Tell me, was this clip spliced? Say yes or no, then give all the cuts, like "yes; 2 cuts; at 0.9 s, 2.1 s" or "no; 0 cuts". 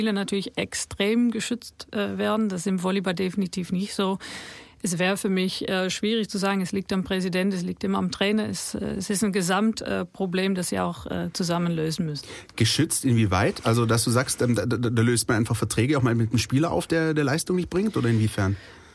no; 0 cuts